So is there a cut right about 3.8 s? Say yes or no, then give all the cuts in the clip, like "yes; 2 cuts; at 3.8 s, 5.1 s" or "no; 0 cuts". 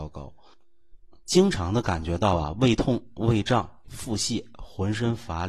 yes; 1 cut; at 3.8 s